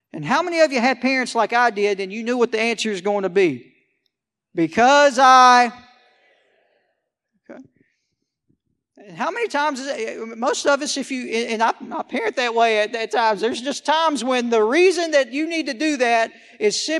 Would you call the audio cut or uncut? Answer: uncut